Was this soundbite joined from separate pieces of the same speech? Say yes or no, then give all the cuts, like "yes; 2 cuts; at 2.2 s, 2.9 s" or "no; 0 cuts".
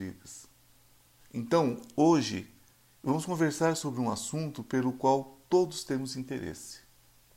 yes; 1 cut; at 1.2 s